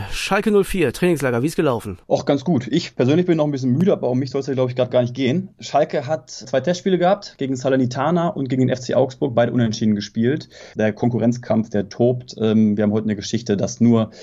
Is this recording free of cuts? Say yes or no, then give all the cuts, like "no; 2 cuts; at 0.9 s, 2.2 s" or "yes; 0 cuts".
no; 2 cuts; at 2.0 s, 10.7 s